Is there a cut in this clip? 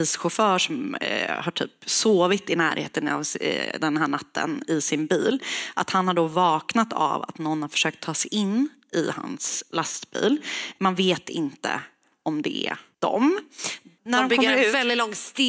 no; 0 cuts

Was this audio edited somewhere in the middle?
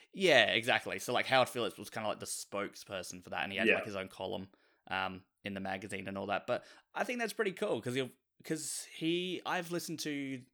no; 0 cuts

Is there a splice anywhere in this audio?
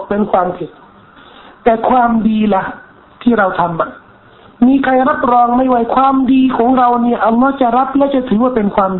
no; 0 cuts

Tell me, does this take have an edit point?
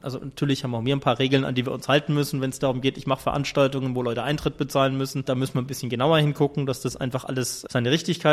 no; 0 cuts

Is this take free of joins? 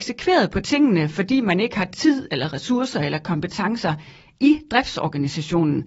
yes; 0 cuts

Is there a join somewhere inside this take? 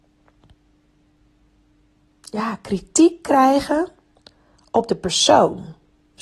no; 0 cuts

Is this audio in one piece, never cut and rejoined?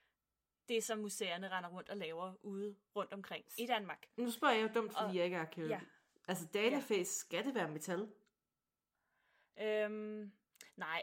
yes; 0 cuts

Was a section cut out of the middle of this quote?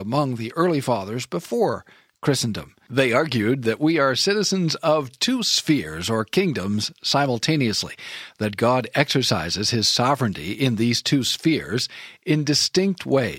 no; 0 cuts

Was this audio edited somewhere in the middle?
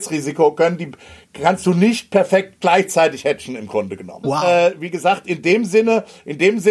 yes; 1 cut; at 4.2 s

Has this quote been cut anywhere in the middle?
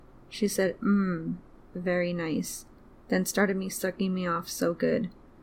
no; 0 cuts

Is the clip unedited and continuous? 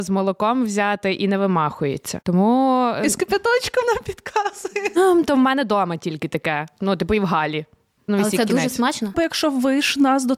no; 2 cuts; at 8.1 s, 9.1 s

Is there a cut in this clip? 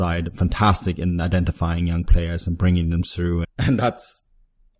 yes; 1 cut; at 3.4 s

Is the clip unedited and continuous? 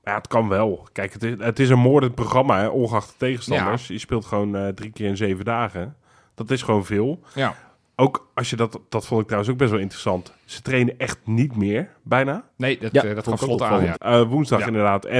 no; 1 cut; at 13.9 s

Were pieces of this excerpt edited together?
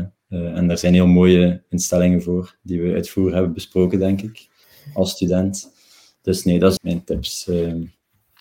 yes; 1 cut; at 6.8 s

